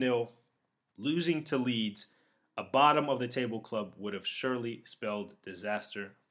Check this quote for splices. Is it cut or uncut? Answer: cut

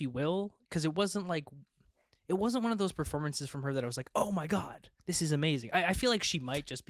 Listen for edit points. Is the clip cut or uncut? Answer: uncut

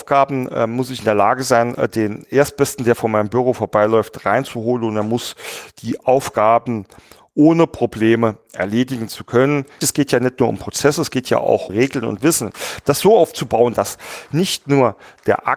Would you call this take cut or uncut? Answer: cut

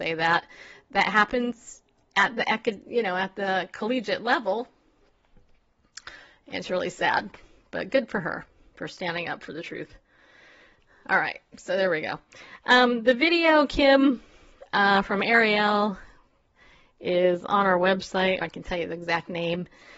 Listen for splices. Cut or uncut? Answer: cut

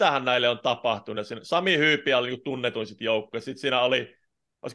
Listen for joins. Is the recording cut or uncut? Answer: uncut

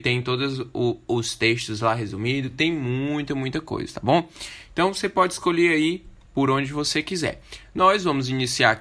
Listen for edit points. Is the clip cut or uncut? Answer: uncut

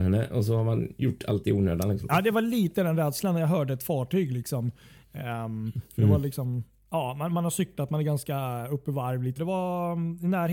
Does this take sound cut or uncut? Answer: cut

